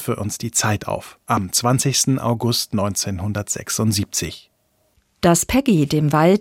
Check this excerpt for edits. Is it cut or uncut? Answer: uncut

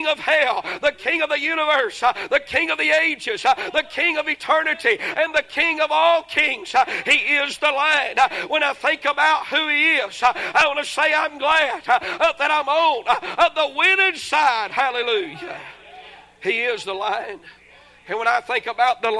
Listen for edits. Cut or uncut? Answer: uncut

